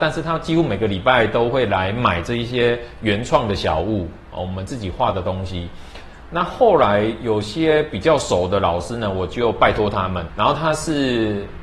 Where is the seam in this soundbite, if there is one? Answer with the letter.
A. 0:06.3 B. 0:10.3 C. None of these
B